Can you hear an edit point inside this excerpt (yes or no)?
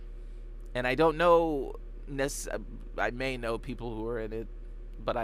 no